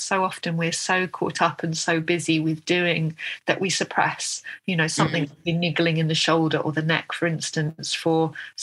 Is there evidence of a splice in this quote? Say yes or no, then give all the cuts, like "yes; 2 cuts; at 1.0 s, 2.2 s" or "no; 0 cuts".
no; 0 cuts